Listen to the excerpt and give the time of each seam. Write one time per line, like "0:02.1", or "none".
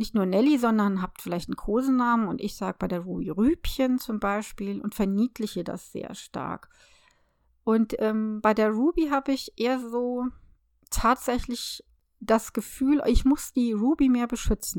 none